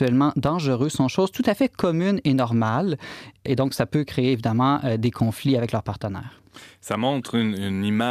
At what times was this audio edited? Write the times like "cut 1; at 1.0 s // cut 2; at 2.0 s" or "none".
none